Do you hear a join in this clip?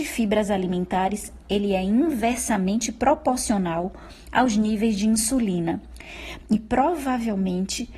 yes; 1 cut; at 6.4 s

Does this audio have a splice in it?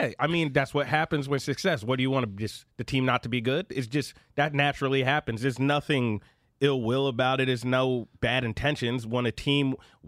no; 0 cuts

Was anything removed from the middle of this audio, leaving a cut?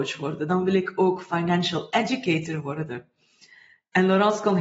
no; 0 cuts

